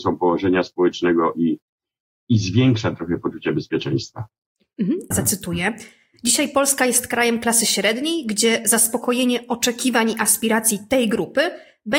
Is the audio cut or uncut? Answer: cut